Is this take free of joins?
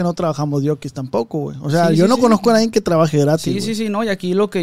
yes; 0 cuts

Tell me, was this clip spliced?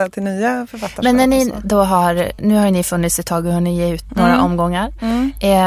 yes; 2 cuts; at 2.4 s, 4.1 s

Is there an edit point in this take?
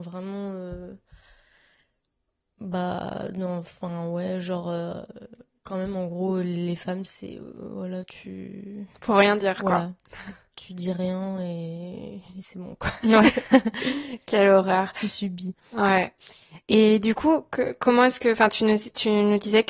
no; 0 cuts

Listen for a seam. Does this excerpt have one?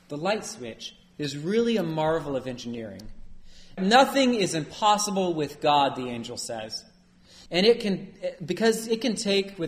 yes; 2 cuts; at 3.8 s, 7.5 s

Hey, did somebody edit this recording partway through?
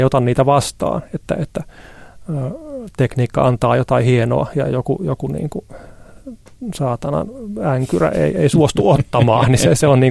no; 0 cuts

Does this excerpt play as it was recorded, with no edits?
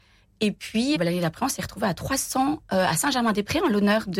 no; 1 cut; at 0.9 s

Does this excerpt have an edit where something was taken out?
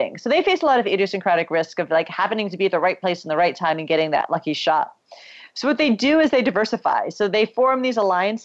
no; 0 cuts

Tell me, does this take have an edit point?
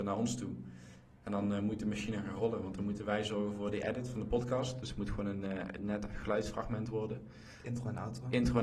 no; 0 cuts

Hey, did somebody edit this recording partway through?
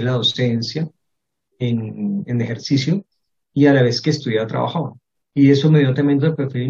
no; 0 cuts

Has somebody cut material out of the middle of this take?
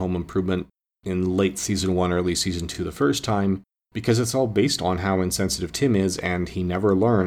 no; 0 cuts

